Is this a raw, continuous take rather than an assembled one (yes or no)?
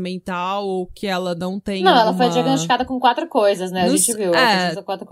yes